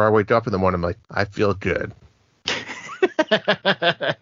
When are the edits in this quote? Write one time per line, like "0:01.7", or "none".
0:01.0